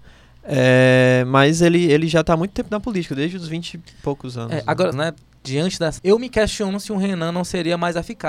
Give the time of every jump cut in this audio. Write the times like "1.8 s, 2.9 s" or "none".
4.9 s, 6.0 s